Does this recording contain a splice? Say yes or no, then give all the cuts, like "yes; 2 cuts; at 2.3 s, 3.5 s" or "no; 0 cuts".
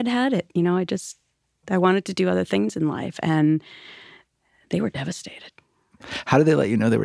no; 0 cuts